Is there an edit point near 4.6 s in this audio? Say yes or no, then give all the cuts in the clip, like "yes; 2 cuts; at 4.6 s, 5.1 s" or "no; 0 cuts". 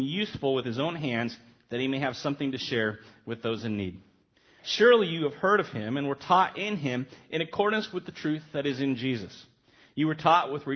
yes; 1 cut; at 4.6 s